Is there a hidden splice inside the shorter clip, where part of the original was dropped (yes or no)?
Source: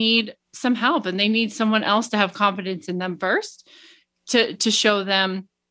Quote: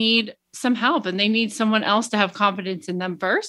no